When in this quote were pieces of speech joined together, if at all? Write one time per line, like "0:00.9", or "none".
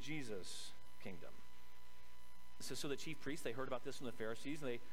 0:02.6